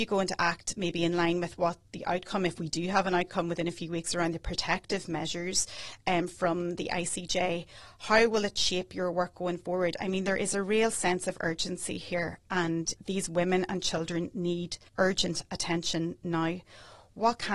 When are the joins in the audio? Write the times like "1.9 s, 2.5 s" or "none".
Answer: 13.0 s, 14.9 s